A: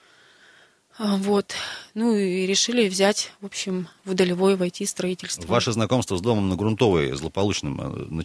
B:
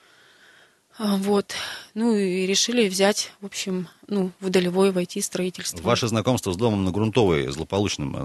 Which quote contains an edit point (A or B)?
A